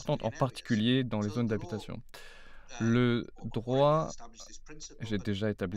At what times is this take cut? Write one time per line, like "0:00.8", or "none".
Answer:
none